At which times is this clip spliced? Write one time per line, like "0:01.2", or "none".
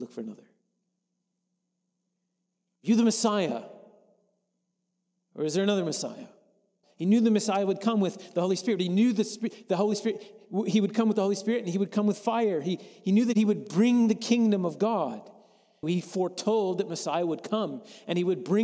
0:06.8
0:15.8